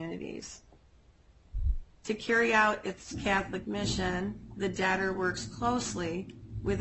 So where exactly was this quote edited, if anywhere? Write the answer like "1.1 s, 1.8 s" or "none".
none